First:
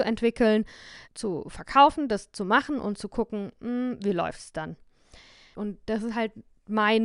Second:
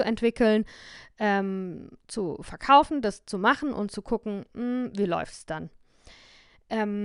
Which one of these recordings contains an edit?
first; 2 cuts; at 1.1 s, 5.5 s

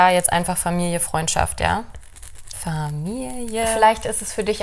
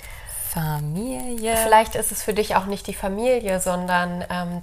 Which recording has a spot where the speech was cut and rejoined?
first; 1 cut; at 2.5 s

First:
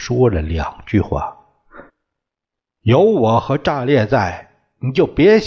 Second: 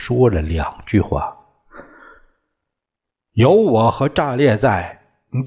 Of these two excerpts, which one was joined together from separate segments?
first; 1 cut; at 1.9 s

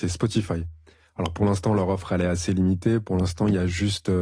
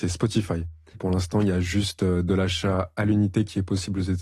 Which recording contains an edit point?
second; 1 cut; at 0.9 s

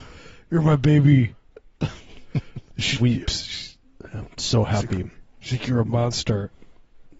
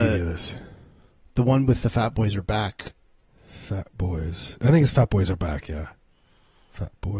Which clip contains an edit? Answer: first; 1 cut; at 3.0 s

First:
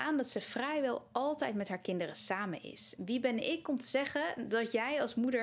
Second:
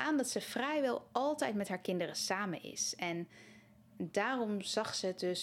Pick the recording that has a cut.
first; 1 cut; at 3.0 s

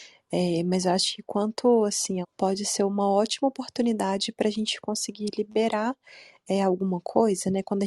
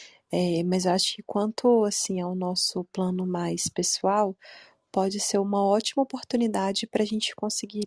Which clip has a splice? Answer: first; 1 cut; at 2.2 s

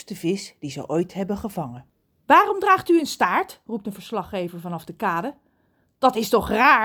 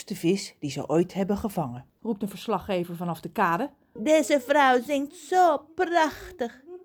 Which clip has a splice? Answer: second; 2 cuts; at 2.0 s, 4.0 s

